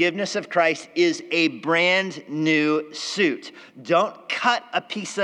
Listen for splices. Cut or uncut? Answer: uncut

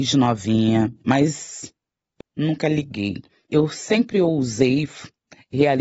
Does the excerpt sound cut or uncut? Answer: cut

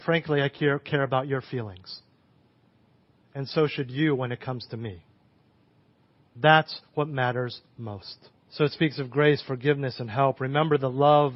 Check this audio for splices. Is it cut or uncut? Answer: cut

